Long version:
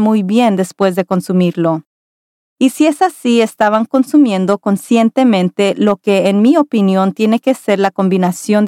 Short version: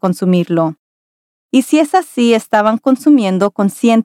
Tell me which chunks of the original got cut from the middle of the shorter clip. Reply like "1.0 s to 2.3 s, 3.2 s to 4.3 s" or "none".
none